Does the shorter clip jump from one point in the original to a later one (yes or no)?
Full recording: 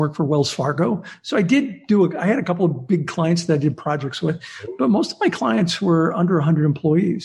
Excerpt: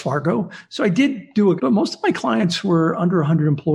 yes